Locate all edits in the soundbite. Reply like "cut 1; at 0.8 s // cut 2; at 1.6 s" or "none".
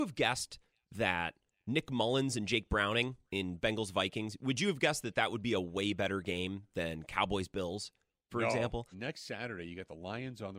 cut 1; at 8.9 s